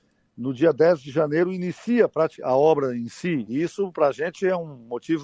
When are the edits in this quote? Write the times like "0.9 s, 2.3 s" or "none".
none